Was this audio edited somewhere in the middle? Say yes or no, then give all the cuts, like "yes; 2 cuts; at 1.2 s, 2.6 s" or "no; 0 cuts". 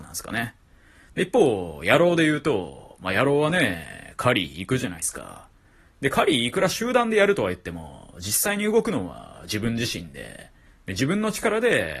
no; 0 cuts